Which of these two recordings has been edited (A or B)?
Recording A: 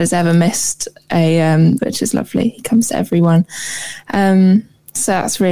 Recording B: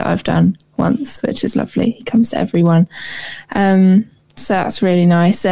A